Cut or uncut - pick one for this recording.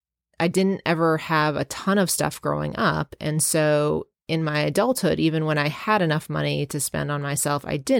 uncut